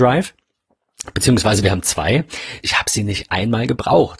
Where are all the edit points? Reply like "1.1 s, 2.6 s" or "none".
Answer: 2.6 s